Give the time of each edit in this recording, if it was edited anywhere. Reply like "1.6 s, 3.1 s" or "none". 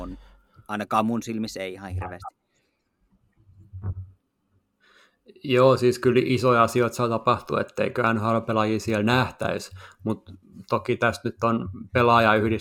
none